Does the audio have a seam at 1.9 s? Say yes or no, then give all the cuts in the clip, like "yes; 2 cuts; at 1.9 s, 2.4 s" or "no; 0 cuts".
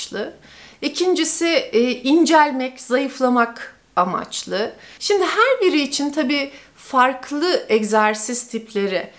no; 1 cut; at 5.0 s